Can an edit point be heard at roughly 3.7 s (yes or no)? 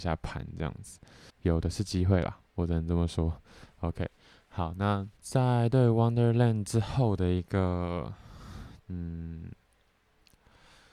no